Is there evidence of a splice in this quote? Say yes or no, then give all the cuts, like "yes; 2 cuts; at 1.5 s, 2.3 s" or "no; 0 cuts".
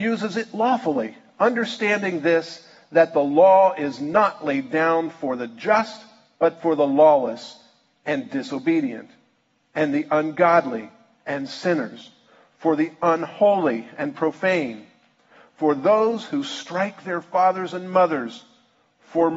no; 0 cuts